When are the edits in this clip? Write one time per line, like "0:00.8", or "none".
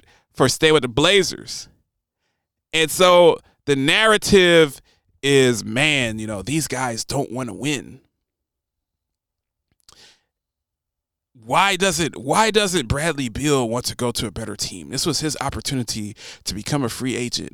none